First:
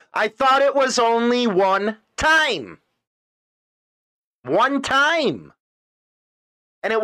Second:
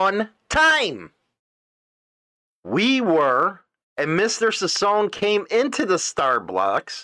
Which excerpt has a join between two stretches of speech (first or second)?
second